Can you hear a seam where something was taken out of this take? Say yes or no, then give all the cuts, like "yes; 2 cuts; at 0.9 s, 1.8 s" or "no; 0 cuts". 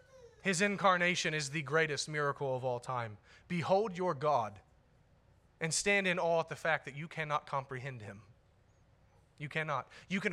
no; 0 cuts